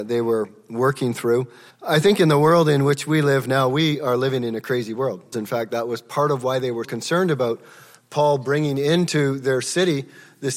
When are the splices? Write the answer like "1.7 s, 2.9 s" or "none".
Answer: 1.7 s, 5.3 s, 6.8 s